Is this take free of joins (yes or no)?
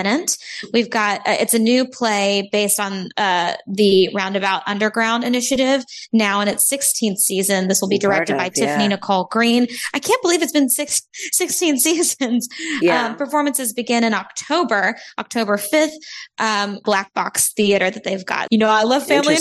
no